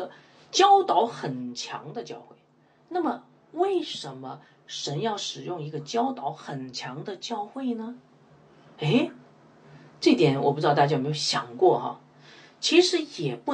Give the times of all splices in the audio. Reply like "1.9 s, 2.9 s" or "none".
none